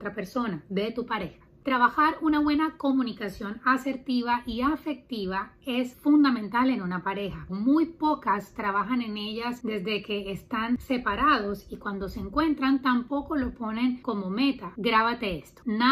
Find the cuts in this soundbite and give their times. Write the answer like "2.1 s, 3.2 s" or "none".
7.5 s, 14.7 s